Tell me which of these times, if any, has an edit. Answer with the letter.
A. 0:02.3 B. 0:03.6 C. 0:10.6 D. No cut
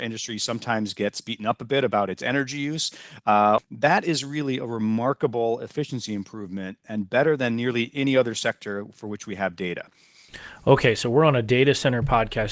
B